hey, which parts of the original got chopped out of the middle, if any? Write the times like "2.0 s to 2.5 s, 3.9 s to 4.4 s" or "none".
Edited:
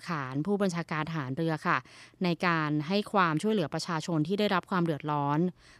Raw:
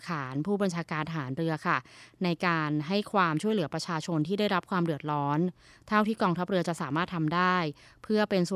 none

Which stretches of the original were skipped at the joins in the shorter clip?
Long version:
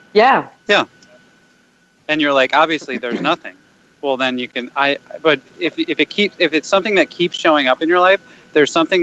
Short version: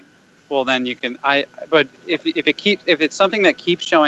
none

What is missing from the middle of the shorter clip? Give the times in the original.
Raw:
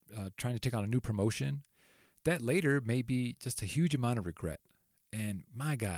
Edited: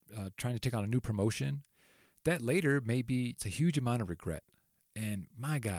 3.4 s to 3.5 s

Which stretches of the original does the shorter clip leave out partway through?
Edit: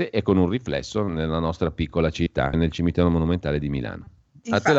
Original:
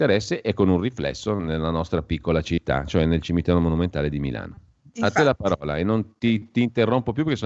2.8 s to 3.0 s

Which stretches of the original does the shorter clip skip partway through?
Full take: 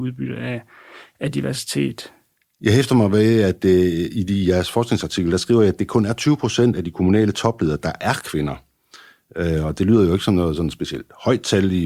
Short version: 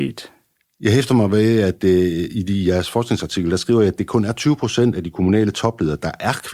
none

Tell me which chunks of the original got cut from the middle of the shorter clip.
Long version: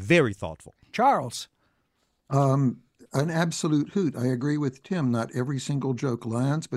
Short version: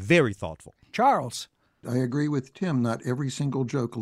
1.8 s to 4.1 s

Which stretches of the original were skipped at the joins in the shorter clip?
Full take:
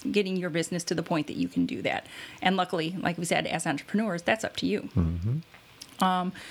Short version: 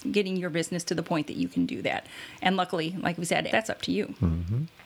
3.5 s to 4.2 s

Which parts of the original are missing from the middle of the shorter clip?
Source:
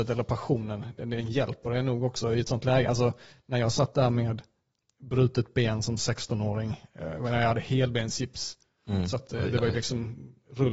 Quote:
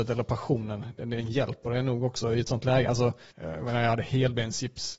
3.3 s to 6.9 s

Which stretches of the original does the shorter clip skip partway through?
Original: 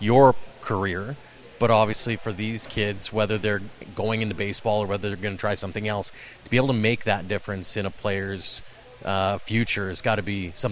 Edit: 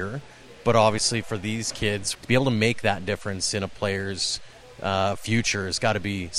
3.1 s to 6.4 s

